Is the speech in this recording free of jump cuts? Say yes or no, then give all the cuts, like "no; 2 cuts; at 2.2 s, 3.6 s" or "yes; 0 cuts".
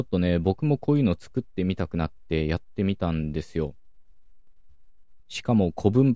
yes; 0 cuts